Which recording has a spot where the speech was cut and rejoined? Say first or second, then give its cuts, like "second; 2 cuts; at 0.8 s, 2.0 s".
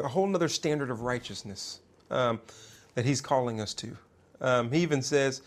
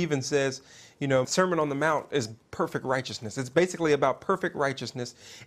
second; 1 cut; at 1.2 s